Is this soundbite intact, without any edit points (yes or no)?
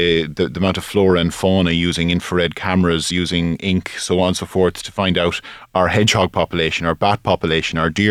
yes